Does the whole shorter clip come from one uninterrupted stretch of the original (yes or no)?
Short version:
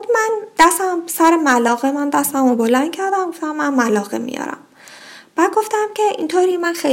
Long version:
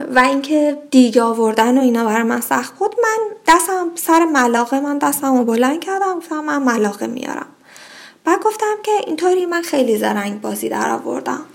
yes